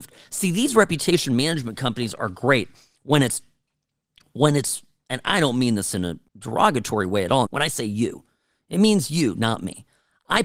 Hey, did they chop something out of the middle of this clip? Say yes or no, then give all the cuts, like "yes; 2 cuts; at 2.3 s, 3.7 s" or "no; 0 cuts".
yes; 2 cuts; at 6.3 s, 7.5 s